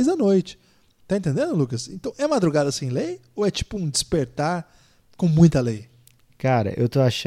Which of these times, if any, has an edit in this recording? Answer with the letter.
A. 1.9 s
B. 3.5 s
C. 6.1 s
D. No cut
D